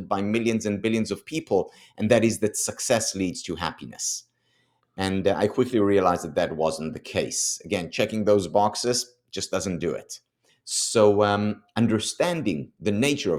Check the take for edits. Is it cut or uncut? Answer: cut